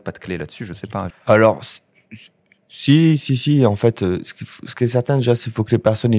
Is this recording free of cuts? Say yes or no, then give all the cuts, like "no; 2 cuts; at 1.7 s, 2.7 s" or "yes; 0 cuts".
no; 1 cut; at 1.1 s